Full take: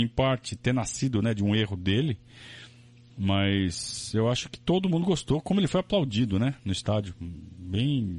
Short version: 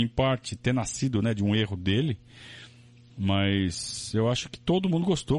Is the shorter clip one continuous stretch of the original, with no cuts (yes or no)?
yes